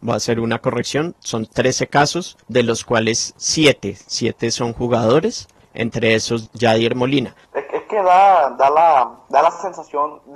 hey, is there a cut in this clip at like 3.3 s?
no; 1 cut; at 7.5 s

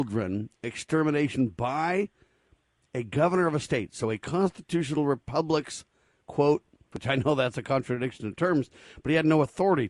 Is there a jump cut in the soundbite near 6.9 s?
yes; 1 cut; at 6.9 s

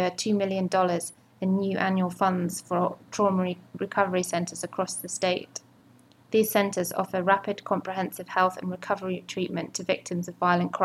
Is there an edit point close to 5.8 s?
no; 0 cuts

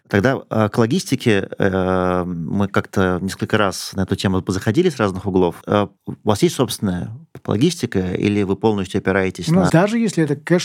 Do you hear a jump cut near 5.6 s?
yes; 2 cuts; at 5.6 s, 9.7 s

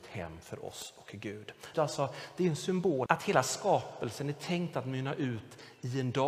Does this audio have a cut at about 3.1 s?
yes; 2 cuts; at 1.7 s, 3.1 s

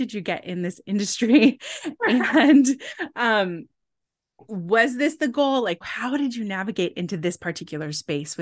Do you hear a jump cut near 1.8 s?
no; 1 cut; at 5.8 s

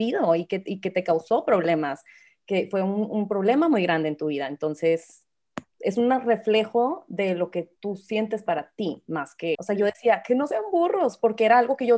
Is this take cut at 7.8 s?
yes; 3 cuts; at 5.7 s, 7.8 s, 9.5 s

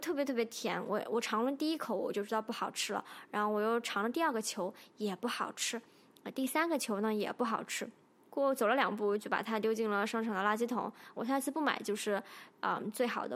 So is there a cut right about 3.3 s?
no; 2 cuts; at 8.3 s, 11.2 s

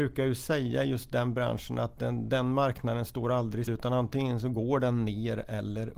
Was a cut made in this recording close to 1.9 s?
no; 1 cut; at 3.7 s

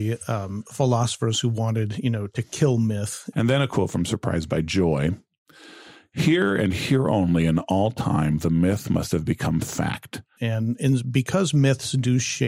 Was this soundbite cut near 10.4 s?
yes; 2 cuts; at 3.3 s, 10.4 s

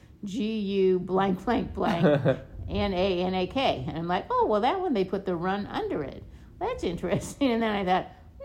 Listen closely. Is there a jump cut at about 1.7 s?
no; 0 cuts

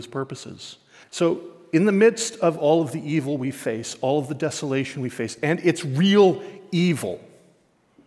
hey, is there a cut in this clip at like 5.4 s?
no; 1 cut; at 1.0 s

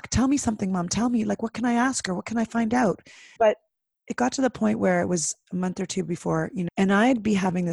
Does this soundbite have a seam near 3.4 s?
yes; 2 cuts; at 3.4 s, 6.7 s

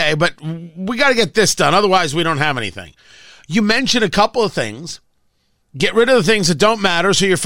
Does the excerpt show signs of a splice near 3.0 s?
no; 0 cuts

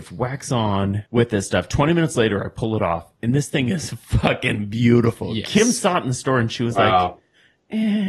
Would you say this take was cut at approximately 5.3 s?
no; 1 cut; at 1.1 s

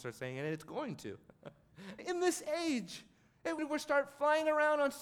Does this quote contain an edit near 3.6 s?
yes; 2 cuts; at 2.0 s, 3.6 s

